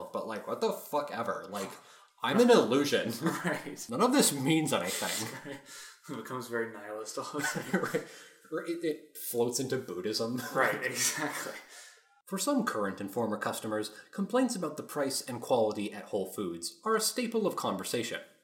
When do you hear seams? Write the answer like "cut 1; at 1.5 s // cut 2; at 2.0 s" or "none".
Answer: none